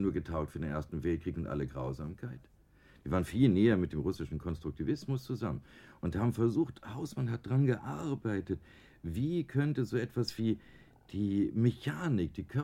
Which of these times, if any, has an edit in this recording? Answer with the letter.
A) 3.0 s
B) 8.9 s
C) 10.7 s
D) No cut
A